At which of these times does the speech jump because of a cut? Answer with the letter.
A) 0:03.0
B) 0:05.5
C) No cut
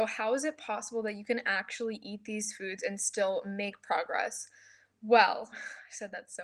B